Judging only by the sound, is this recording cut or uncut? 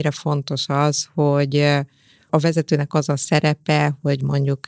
uncut